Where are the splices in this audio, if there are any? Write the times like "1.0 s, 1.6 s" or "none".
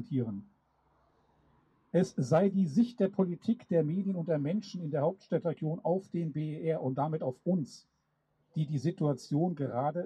none